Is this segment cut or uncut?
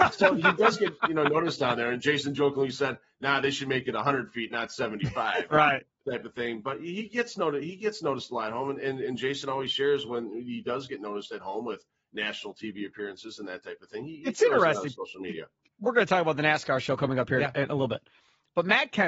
uncut